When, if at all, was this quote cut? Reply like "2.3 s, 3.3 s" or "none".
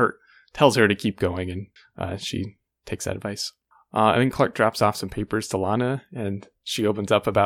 none

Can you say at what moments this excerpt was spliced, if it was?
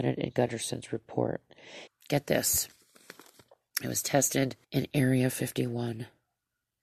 1.9 s, 4.6 s

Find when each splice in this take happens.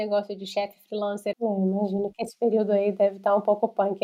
1.3 s

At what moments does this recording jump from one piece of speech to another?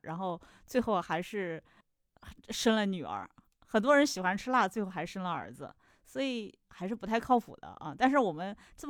none

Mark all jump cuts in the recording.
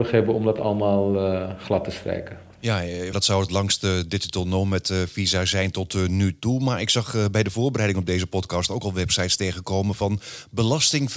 3.1 s

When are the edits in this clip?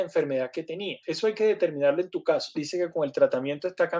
1.0 s, 2.5 s

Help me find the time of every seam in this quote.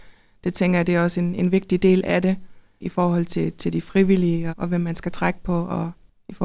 4.5 s

